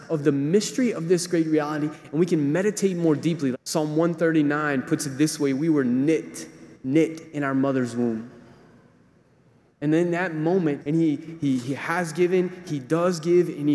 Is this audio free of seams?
no; 2 cuts; at 3.5 s, 10.8 s

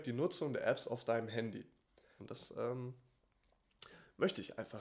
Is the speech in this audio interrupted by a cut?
yes; 1 cut; at 2.2 s

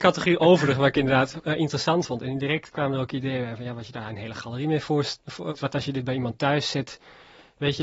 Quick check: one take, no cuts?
no; 1 cut; at 5.5 s

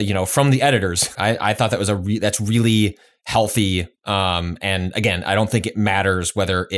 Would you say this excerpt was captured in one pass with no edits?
no; 1 cut; at 1.1 s

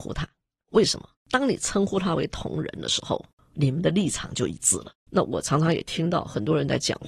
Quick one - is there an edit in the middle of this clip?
yes; 2 cuts; at 1.2 s, 5.1 s

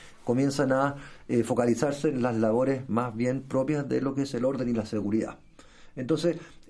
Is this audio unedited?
yes; 0 cuts

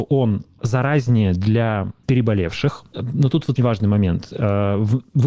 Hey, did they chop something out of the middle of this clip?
yes; 1 cut; at 3.6 s

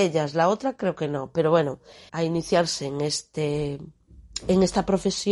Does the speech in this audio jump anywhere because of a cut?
yes; 1 cut; at 2.1 s

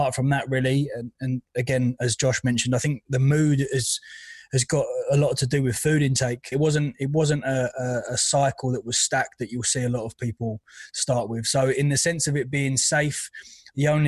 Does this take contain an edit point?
yes; 1 cut; at 6.5 s

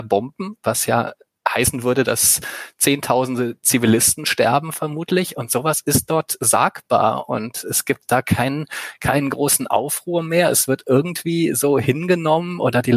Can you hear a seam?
no; 0 cuts

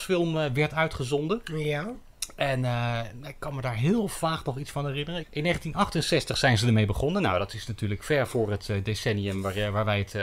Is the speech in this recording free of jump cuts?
no; 1 cut; at 5.2 s

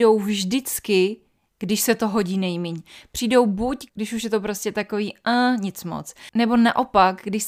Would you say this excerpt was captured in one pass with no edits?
no; 1 cut; at 3.9 s

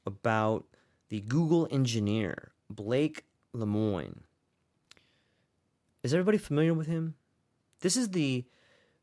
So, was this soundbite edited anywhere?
no; 0 cuts

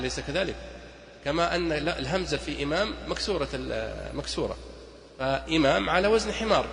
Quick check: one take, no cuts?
yes; 0 cuts

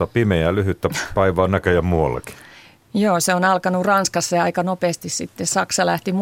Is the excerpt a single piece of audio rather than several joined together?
yes; 0 cuts

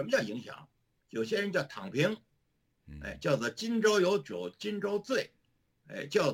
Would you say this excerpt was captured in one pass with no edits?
yes; 0 cuts

